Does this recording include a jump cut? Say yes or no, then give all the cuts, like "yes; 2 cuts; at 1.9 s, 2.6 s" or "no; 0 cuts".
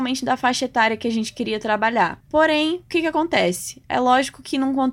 yes; 1 cut; at 2.2 s